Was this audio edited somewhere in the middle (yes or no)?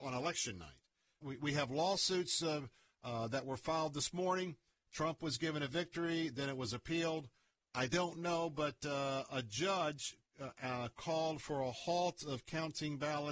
yes